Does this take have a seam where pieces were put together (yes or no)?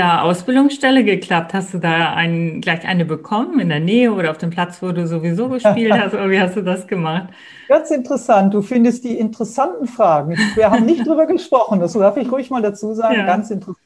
no